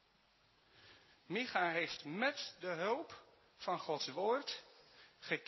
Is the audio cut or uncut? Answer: uncut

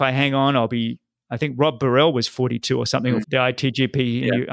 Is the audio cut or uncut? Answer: cut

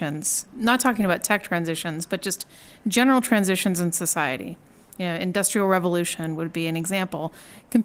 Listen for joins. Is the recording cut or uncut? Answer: uncut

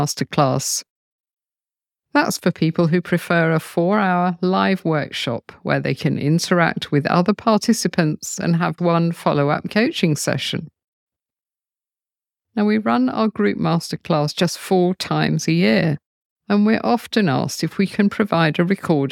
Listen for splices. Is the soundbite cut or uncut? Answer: cut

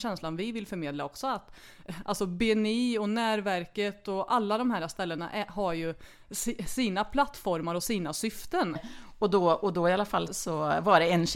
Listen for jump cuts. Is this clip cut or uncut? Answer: cut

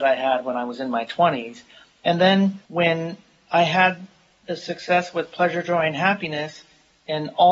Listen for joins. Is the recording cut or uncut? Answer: cut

